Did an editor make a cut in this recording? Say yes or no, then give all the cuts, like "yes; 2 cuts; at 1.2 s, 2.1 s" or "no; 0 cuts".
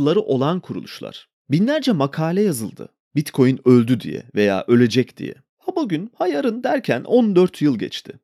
yes; 1 cut; at 1.4 s